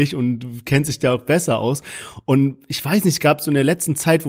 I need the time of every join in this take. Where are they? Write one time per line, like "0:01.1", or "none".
none